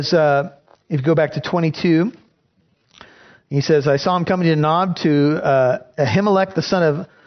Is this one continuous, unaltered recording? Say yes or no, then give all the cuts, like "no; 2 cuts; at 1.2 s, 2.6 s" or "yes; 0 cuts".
yes; 0 cuts